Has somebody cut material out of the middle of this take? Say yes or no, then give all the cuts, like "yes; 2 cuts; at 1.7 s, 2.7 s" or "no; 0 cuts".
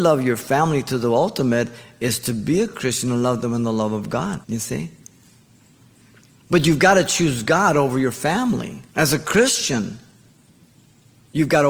yes; 2 cuts; at 4.4 s, 8.9 s